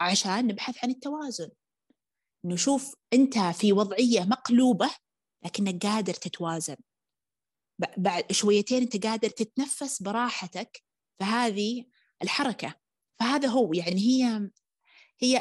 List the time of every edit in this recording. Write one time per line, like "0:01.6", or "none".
none